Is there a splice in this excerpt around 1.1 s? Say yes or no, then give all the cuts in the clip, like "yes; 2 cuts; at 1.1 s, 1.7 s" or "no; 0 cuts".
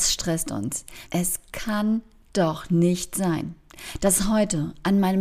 yes; 1 cut; at 1.1 s